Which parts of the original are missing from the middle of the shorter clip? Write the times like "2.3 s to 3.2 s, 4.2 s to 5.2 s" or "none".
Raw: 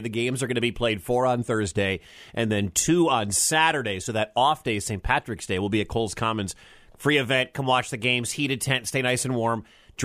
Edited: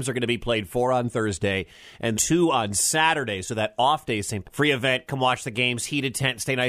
2.5 s to 2.7 s, 5.0 s to 6.9 s